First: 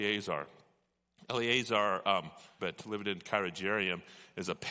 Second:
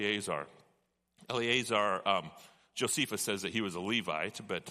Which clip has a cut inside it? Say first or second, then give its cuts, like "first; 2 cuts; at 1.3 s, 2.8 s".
first; 1 cut; at 2.6 s